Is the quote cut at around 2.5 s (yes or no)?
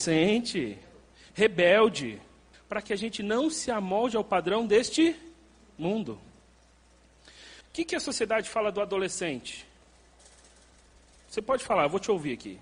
yes